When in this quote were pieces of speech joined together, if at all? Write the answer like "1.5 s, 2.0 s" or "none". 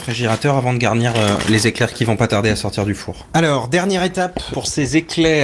none

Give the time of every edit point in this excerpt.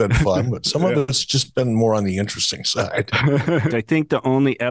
3.7 s

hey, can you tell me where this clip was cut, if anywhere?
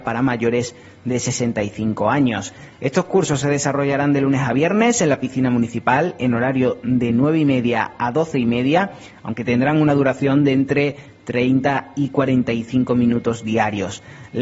none

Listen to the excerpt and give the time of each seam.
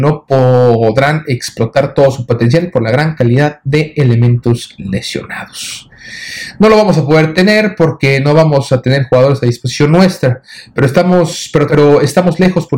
11.7 s

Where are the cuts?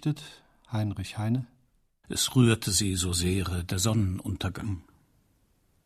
2.0 s

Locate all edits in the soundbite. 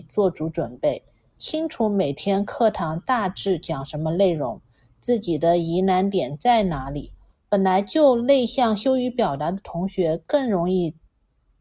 7.3 s

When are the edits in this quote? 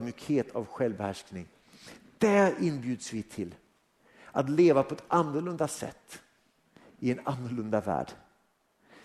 none

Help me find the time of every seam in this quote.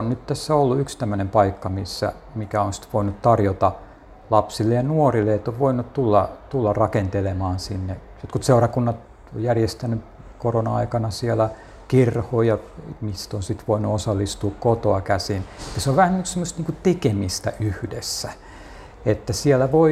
none

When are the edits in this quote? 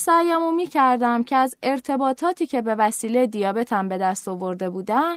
none

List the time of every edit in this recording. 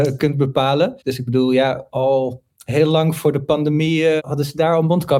1.0 s, 4.2 s

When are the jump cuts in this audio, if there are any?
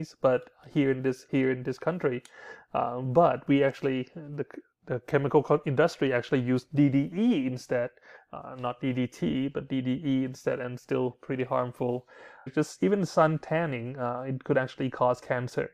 1.3 s, 12.5 s

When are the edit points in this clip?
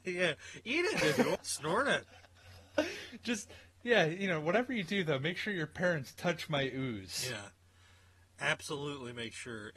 1.4 s

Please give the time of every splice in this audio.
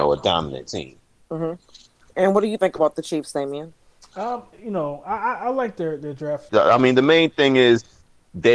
4.5 s, 6.5 s

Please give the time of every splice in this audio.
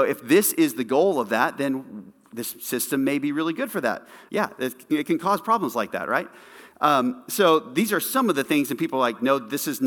4.3 s

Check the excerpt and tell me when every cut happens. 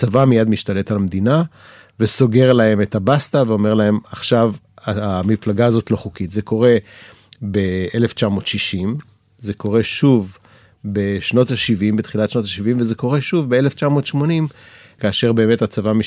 none

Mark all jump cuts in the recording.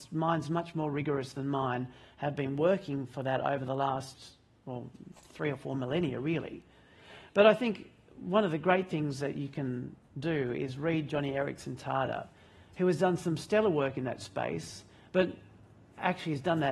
none

